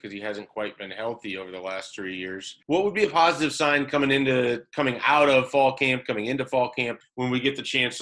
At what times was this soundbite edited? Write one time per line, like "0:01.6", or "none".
0:02.6
0:07.0